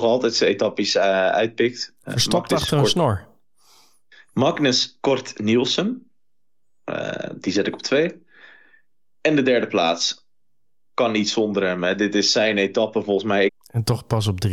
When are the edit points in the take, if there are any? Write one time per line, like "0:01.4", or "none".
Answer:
0:13.5